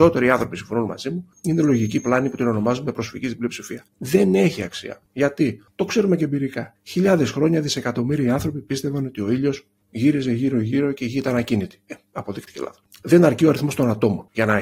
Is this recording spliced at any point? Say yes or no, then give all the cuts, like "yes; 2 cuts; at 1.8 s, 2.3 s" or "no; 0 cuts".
no; 0 cuts